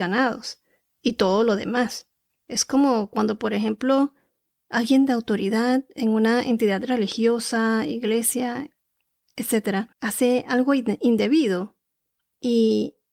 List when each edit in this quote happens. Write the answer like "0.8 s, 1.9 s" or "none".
2.4 s, 9.9 s